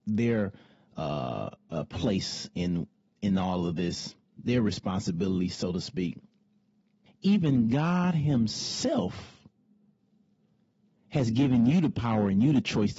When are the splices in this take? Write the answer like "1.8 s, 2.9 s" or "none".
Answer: 7.1 s